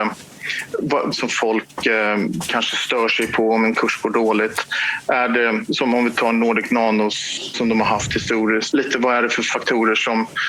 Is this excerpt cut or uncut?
cut